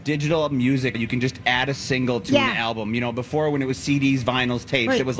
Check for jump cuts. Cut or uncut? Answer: cut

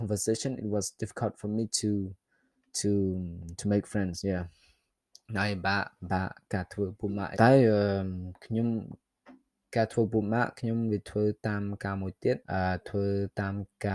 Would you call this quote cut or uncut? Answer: cut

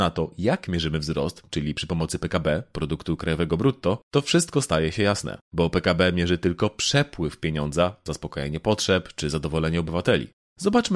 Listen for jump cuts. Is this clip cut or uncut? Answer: cut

